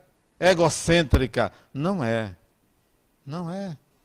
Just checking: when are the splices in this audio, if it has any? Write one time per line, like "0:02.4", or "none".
none